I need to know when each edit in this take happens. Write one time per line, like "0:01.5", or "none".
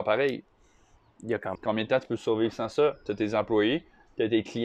0:01.6